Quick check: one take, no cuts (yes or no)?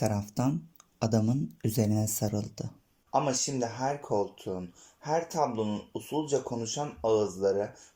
no